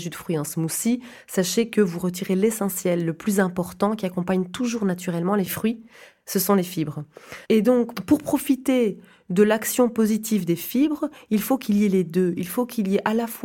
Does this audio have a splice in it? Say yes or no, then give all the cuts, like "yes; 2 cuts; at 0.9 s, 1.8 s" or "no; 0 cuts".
yes; 1 cut; at 7.4 s